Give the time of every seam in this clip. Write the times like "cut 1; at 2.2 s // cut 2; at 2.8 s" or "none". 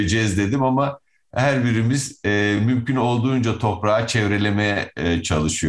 none